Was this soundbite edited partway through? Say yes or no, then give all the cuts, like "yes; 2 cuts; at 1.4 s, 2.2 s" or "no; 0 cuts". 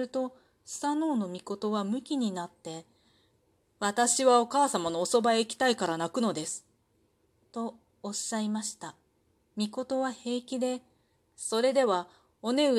yes; 1 cut; at 9.4 s